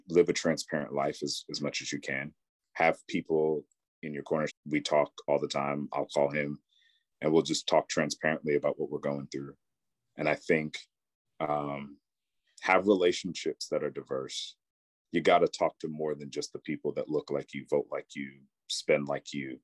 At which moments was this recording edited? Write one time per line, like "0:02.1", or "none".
0:04.5